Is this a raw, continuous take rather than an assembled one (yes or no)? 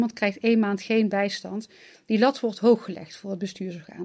yes